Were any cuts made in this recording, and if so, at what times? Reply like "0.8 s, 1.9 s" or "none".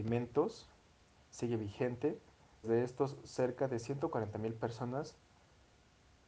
2.6 s